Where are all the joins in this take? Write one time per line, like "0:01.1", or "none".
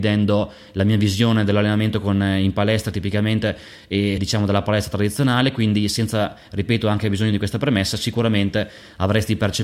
0:04.2